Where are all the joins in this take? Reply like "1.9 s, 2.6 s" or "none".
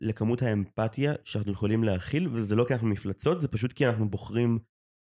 none